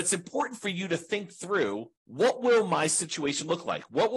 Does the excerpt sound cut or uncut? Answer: cut